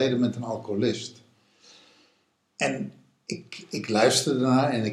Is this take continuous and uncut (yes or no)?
yes